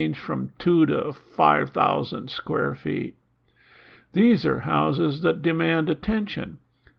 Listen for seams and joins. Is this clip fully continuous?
yes; 0 cuts

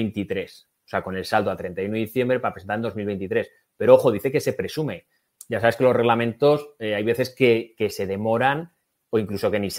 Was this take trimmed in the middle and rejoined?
no; 0 cuts

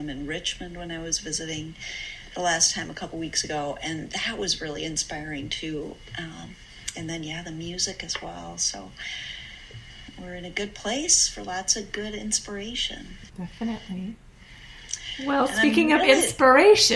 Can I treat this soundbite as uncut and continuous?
no; 1 cut; at 13.3 s

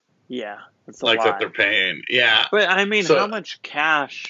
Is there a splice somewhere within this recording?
no; 0 cuts

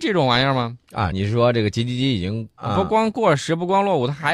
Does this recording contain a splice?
yes; 2 cuts; at 1.1 s, 2.6 s

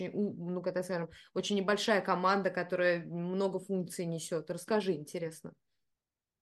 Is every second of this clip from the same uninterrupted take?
yes; 0 cuts

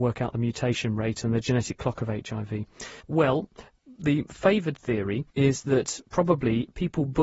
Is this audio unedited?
no; 2 cuts; at 3.0 s, 5.3 s

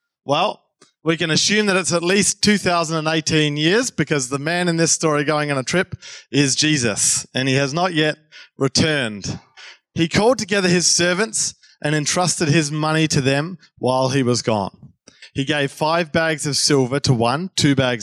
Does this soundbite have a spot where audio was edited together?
no; 0 cuts

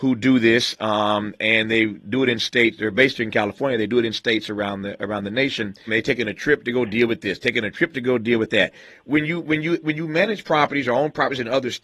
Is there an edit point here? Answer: yes; 1 cut; at 5.9 s

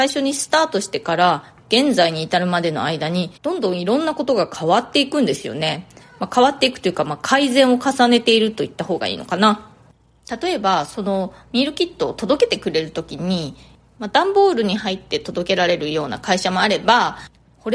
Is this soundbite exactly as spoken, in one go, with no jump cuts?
no; 1 cut; at 3.4 s

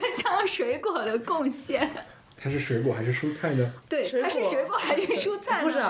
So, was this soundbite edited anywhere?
yes; 1 cut; at 3.8 s

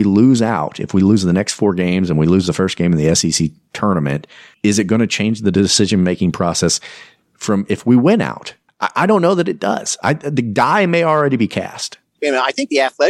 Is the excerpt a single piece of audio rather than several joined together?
yes; 0 cuts

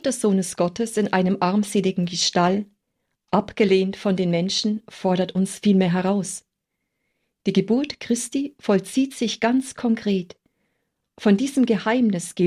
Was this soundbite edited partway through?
yes; 1 cut; at 11.0 s

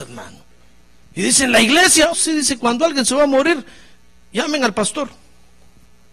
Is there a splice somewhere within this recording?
yes; 2 cuts; at 1.0 s, 2.1 s

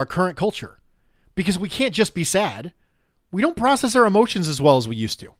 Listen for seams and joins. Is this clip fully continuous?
no; 1 cut; at 3.2 s

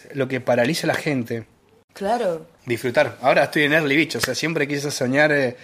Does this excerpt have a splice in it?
yes; 1 cut; at 1.9 s

